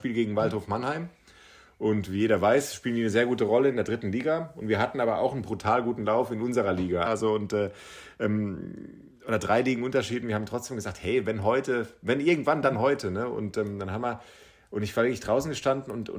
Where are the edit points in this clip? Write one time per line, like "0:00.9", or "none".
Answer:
0:07.0